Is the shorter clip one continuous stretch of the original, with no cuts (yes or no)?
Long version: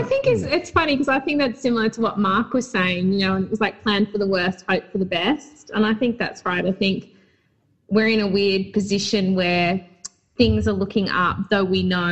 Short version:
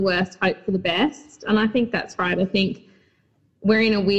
yes